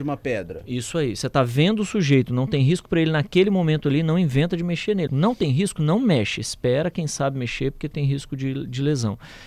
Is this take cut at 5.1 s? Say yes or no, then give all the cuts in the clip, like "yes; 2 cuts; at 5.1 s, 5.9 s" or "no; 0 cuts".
yes; 1 cut; at 5.1 s